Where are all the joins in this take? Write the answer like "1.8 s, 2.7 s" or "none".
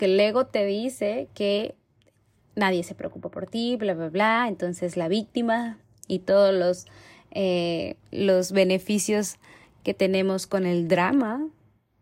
none